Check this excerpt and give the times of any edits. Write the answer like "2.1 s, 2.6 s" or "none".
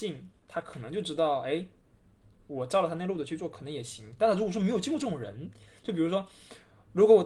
none